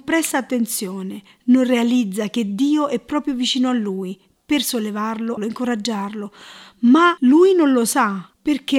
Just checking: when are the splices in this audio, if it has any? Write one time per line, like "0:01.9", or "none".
0:05.4